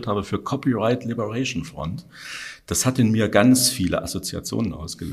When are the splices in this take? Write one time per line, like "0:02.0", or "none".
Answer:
none